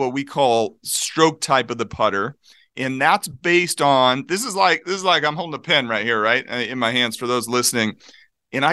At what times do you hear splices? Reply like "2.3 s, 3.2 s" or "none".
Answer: none